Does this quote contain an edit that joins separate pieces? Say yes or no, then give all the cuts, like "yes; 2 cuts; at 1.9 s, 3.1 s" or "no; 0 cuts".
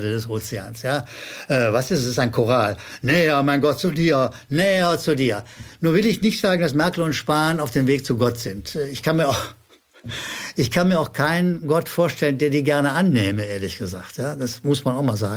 no; 0 cuts